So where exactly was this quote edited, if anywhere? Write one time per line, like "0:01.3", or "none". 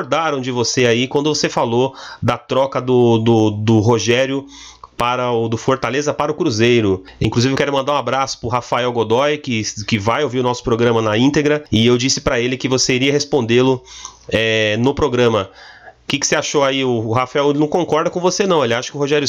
none